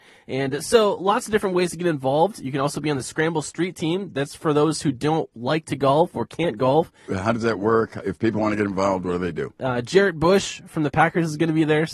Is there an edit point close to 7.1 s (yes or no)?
yes